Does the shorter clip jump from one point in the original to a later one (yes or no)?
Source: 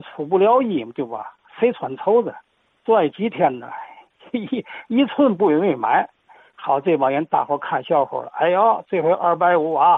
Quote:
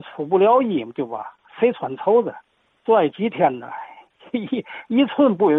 no